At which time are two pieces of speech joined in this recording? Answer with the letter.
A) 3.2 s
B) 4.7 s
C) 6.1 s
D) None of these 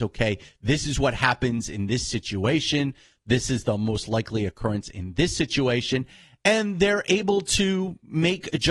D